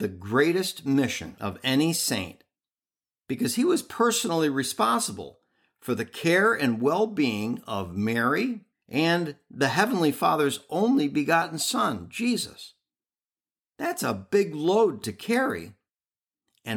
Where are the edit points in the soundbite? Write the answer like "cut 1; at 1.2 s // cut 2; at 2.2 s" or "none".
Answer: cut 1; at 8.7 s